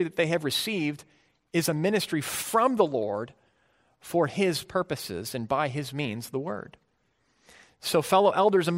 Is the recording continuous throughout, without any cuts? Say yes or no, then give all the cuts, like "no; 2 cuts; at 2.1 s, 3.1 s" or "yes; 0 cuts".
yes; 0 cuts